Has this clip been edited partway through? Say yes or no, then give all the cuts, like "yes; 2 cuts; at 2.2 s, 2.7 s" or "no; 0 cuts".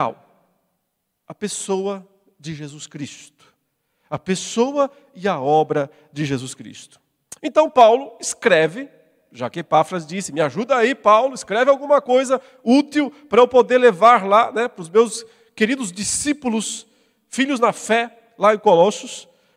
yes; 1 cut; at 1.2 s